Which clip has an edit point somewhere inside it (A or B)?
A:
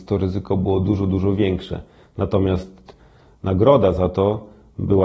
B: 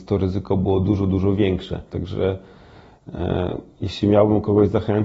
B